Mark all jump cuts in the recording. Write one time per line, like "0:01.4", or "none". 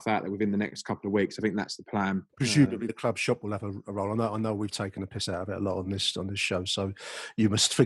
none